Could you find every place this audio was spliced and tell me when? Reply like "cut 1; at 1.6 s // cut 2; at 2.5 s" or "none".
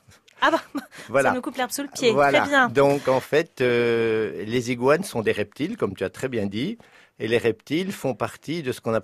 none

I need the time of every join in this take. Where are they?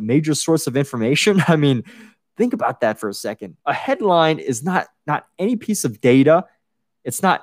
cut 1; at 3.6 s

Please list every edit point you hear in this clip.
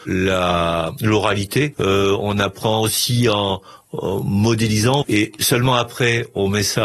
cut 1; at 1.7 s // cut 2; at 5.0 s

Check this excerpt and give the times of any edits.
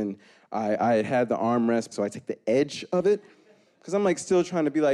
cut 1; at 1.9 s

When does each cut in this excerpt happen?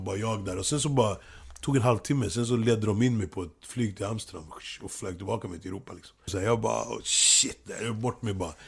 cut 1; at 6.3 s

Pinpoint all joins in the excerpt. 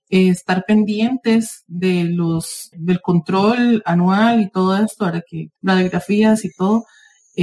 cut 1; at 2.7 s // cut 2; at 5.6 s

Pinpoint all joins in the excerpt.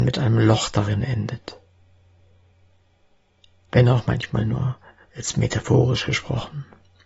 none

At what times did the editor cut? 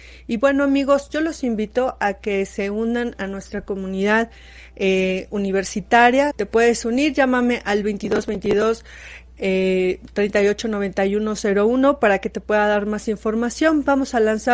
cut 1; at 6.3 s

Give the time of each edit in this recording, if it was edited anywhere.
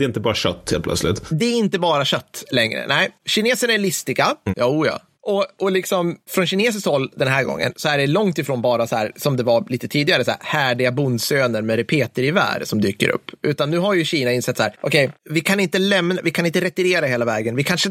cut 1; at 4.5 s

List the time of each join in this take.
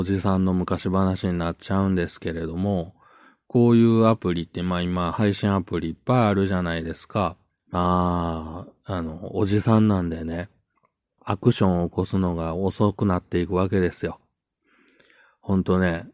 cut 1; at 7.6 s // cut 2; at 11.2 s

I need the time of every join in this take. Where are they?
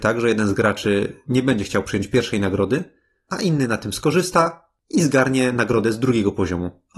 none

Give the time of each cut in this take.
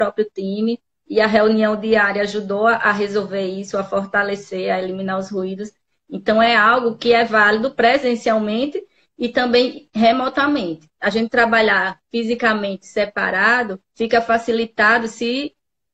cut 1; at 11.0 s // cut 2; at 13.9 s

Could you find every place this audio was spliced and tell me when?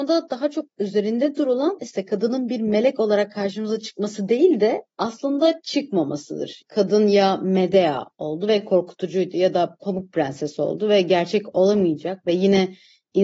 cut 1; at 6.6 s

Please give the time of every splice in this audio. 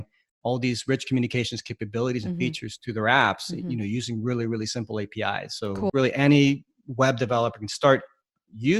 cut 1; at 5.9 s

